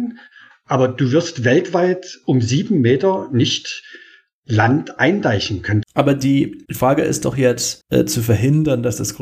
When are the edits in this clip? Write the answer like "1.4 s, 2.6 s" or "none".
5.8 s, 7.8 s